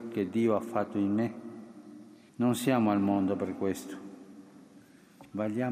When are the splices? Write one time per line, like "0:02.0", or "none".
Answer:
0:02.3